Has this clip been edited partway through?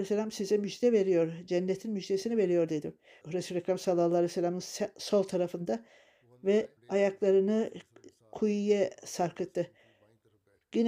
yes; 2 cuts; at 3.2 s, 6.8 s

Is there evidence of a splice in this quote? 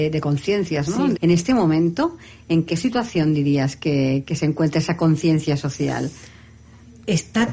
yes; 1 cut; at 1.2 s

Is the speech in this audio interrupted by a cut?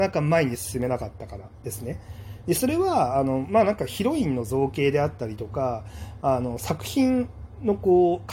no; 0 cuts

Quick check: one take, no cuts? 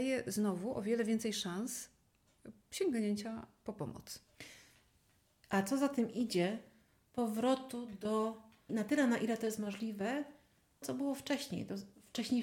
no; 2 cuts; at 8.7 s, 10.8 s

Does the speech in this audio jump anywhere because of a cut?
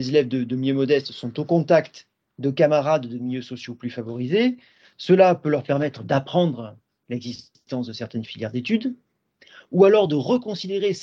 no; 0 cuts

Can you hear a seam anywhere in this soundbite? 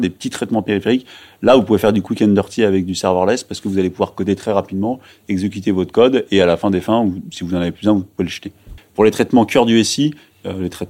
yes; 1 cut; at 8.8 s

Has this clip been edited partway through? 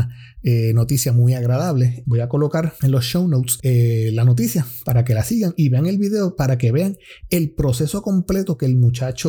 yes; 1 cut; at 2.0 s

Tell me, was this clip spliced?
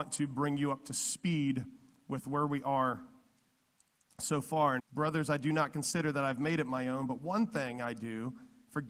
yes; 1 cut; at 4.8 s

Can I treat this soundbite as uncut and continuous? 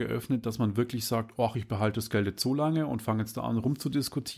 yes; 0 cuts

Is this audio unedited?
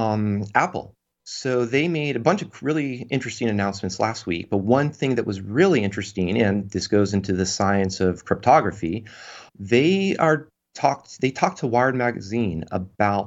no; 1 cut; at 9.5 s

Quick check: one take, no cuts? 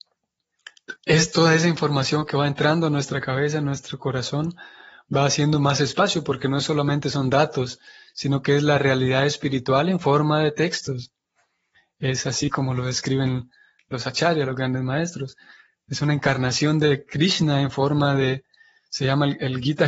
no; 1 cut; at 1.0 s

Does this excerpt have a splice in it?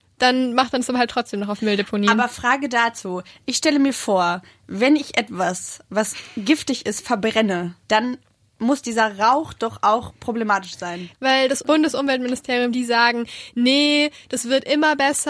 yes; 3 cuts; at 7.8 s, 11.1 s, 12.7 s

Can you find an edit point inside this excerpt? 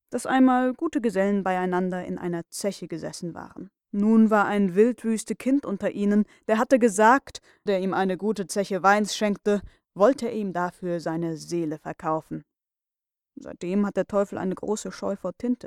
yes; 3 cuts; at 3.8 s, 7.7 s, 13.2 s

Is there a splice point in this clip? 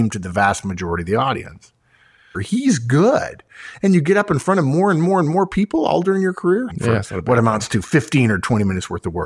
yes; 2 cuts; at 2.3 s, 6.7 s

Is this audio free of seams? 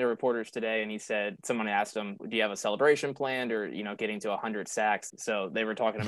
no; 2 cuts; at 2.2 s, 5.1 s

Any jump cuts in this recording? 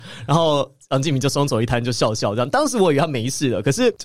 no; 0 cuts

